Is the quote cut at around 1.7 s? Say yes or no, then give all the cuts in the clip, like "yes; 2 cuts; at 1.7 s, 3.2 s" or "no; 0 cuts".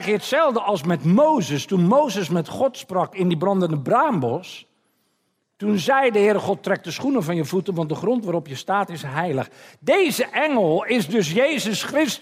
no; 0 cuts